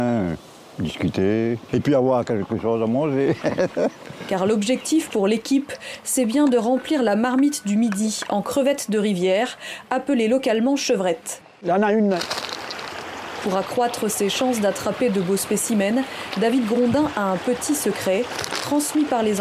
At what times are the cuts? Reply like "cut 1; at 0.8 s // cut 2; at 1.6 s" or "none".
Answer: none